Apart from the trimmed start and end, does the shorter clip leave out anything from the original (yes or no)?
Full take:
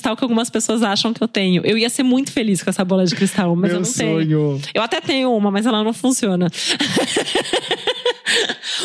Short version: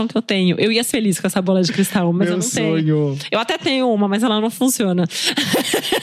yes